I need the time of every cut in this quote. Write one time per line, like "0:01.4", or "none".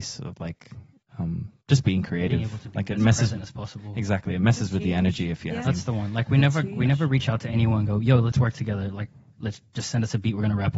0:05.6